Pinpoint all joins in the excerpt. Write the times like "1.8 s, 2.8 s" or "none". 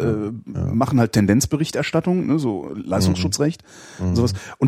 none